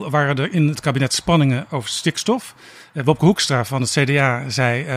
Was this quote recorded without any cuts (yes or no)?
yes